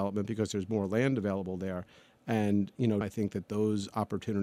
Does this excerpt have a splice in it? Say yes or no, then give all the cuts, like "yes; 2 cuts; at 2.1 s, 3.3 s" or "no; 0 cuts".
yes; 1 cut; at 3.0 s